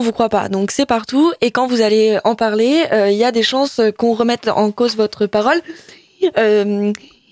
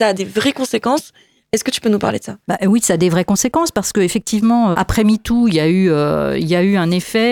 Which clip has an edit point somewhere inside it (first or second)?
second